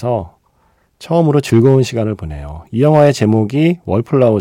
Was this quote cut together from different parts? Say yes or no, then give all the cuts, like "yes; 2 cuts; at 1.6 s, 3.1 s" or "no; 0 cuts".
no; 0 cuts